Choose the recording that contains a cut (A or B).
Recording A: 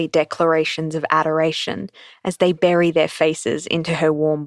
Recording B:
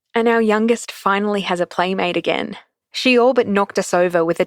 B